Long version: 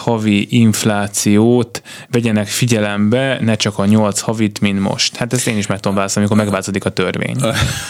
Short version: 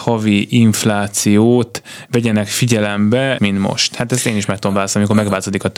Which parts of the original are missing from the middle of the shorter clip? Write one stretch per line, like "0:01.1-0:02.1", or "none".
0:03.4-0:04.6